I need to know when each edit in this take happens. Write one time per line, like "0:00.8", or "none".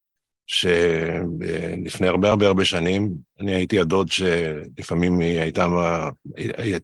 none